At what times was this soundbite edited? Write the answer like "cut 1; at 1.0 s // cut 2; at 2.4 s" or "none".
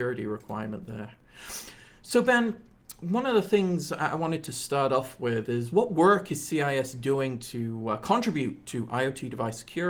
none

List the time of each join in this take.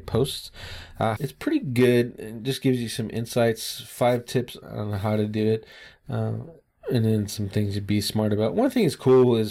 cut 1; at 1.2 s // cut 2; at 4.6 s

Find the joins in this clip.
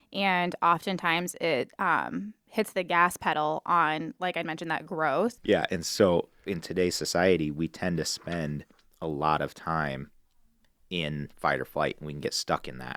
cut 1; at 5.4 s

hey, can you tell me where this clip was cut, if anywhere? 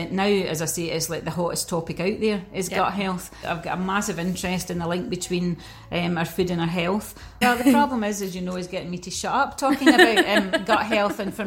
cut 1; at 3.4 s // cut 2; at 7.4 s

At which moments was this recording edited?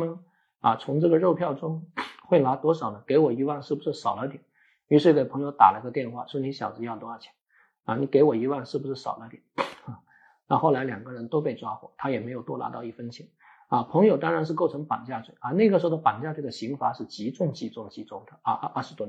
none

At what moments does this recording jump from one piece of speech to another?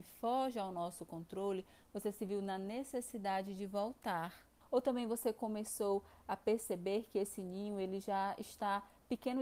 cut 1; at 4.6 s

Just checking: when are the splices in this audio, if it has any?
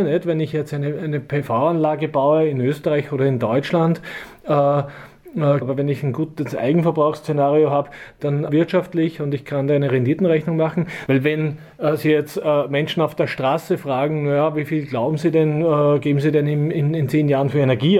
cut 1; at 5.6 s // cut 2; at 8.5 s // cut 3; at 11.1 s

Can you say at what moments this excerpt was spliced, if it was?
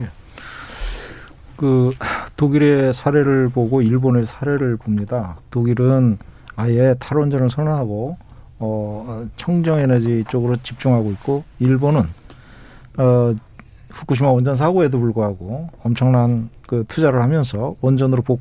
cut 1; at 9.3 s

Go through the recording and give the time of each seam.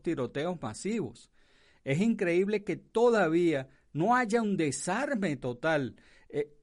none

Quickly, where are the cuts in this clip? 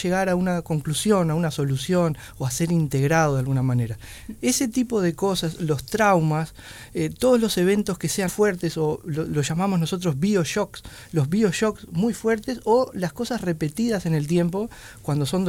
cut 1; at 4.4 s // cut 2; at 8.3 s

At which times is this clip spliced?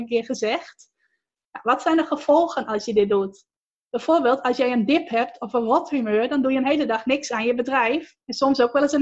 none

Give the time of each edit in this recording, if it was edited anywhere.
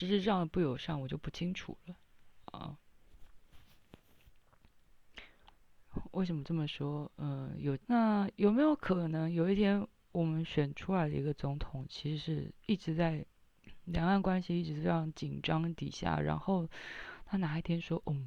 cut 1; at 7.8 s

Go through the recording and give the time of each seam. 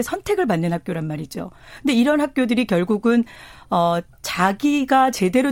none

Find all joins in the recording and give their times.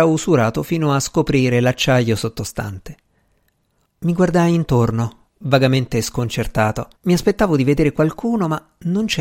cut 1; at 3.8 s // cut 2; at 7.0 s

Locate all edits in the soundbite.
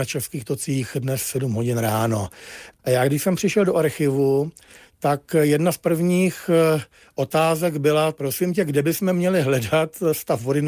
none

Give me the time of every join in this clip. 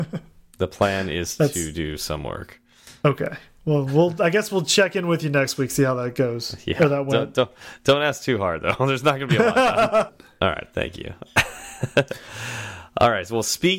cut 1; at 10.1 s

